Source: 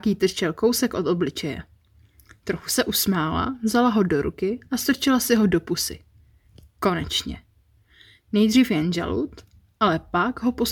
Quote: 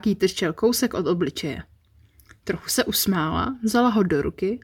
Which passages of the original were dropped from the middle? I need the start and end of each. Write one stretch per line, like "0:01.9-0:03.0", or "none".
none